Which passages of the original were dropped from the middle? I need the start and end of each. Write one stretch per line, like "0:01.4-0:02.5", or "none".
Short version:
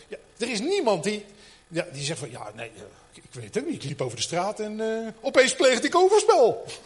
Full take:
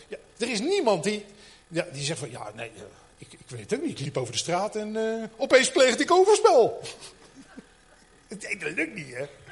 0:03.1-0:03.3